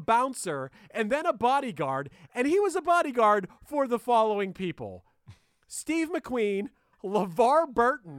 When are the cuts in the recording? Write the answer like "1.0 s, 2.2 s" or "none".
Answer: 6.9 s